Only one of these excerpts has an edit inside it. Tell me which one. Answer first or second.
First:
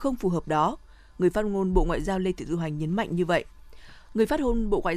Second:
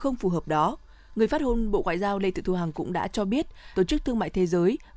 second